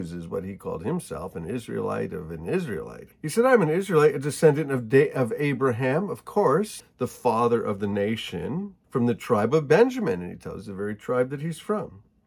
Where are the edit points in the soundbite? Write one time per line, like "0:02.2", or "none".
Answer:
0:03.1
0:06.8
0:08.8